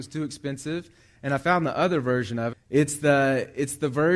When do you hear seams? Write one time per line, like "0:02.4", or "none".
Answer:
0:02.5